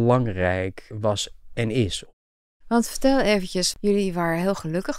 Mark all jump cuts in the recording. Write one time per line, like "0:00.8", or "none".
none